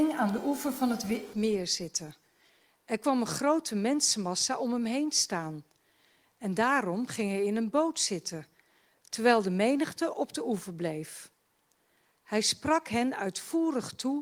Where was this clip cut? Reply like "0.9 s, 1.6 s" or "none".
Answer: 1.3 s